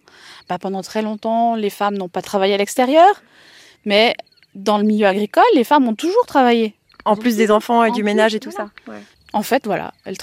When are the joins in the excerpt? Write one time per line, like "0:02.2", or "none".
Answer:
0:09.1